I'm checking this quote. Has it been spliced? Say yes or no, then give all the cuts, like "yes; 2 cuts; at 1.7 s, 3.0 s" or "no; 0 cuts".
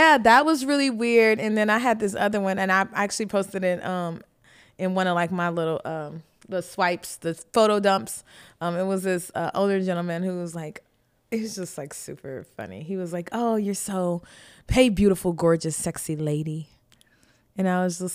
no; 0 cuts